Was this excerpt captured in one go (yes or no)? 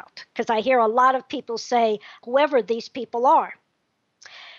no